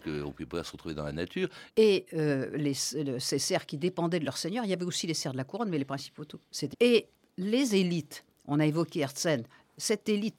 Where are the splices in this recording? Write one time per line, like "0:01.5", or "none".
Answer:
0:01.7
0:06.7